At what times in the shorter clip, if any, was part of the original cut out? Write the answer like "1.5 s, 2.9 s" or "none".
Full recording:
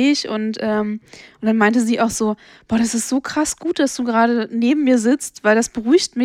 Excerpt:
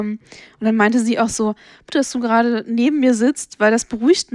1.9 s